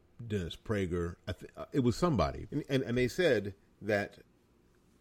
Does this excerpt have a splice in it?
yes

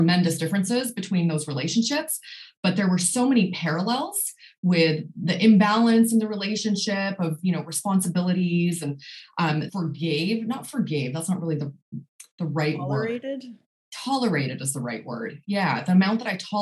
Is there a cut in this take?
yes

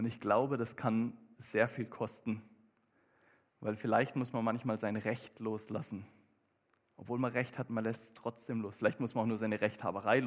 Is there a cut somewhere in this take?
no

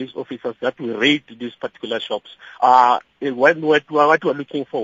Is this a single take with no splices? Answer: no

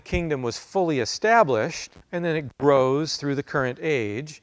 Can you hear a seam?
yes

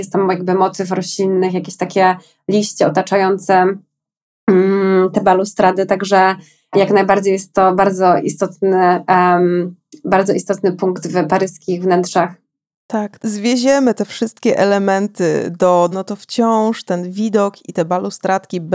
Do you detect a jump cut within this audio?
yes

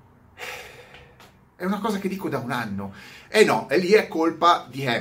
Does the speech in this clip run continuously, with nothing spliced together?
no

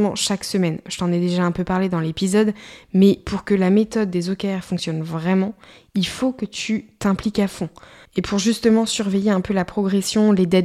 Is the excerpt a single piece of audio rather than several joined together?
no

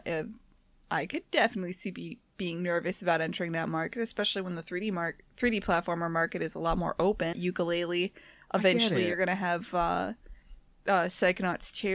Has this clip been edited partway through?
yes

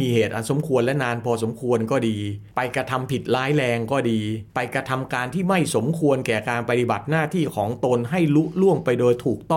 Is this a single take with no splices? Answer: no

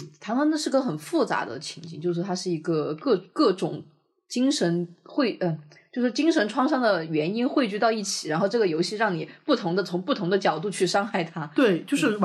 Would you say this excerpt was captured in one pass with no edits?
yes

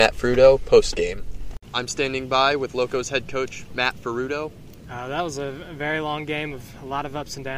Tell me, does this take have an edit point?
yes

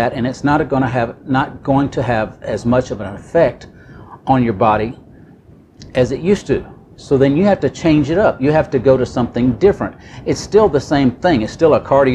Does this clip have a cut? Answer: no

